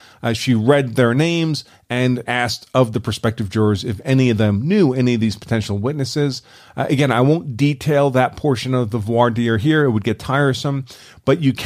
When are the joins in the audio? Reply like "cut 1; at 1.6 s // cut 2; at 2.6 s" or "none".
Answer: cut 1; at 2.3 s